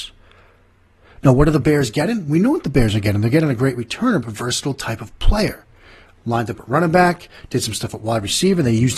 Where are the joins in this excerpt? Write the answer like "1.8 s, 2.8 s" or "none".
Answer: 4.2 s